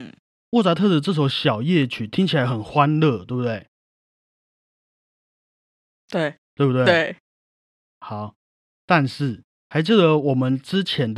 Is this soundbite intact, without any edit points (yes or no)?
yes